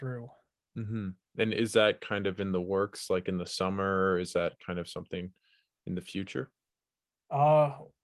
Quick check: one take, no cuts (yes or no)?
yes